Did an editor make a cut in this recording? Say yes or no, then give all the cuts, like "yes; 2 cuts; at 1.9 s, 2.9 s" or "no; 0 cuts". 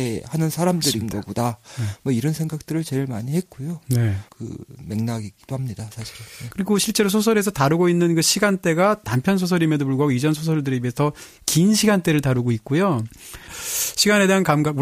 yes; 3 cuts; at 4.3 s, 6.5 s, 13.5 s